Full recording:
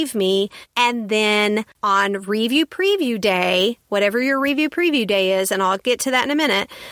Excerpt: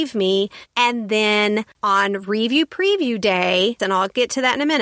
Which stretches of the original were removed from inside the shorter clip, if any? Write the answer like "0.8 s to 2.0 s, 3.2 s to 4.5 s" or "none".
3.8 s to 5.5 s